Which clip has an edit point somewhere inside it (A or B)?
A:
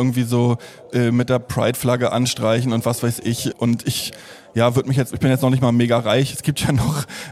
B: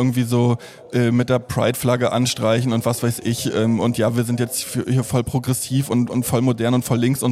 A